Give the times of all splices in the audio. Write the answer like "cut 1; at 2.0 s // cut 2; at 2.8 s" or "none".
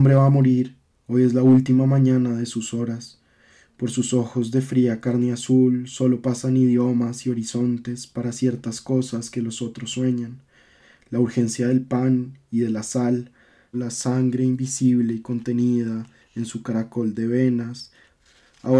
cut 1; at 13.7 s